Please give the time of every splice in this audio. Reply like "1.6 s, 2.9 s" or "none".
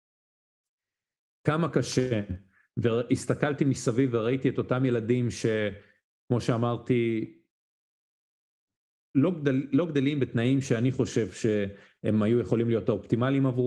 none

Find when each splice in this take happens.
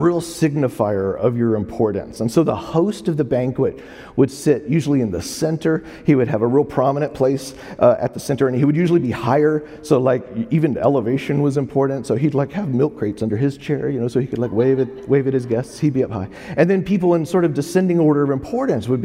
none

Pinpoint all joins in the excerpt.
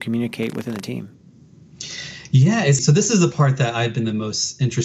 2.8 s

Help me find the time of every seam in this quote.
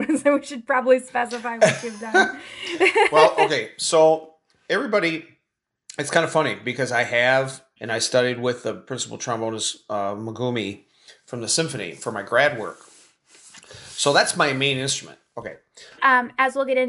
7.8 s, 16.0 s

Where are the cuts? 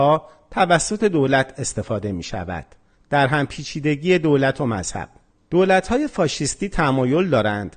2.9 s

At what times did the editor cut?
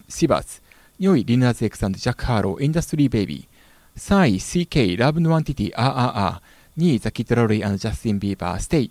none

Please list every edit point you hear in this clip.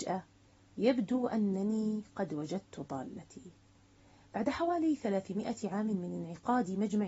none

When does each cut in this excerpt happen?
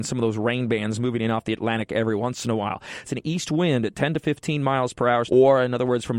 3.0 s, 5.3 s

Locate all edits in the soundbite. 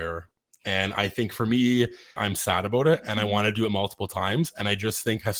2.2 s

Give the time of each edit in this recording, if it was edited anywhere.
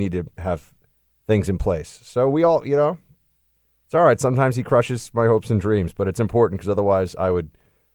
none

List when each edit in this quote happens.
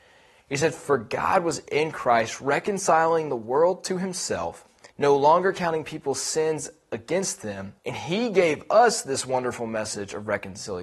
4.9 s, 7.8 s

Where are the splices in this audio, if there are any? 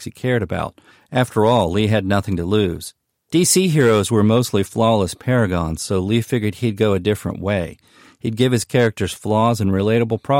none

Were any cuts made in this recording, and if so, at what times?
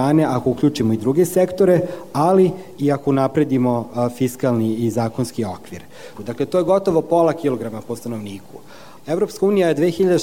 6.1 s, 9.0 s

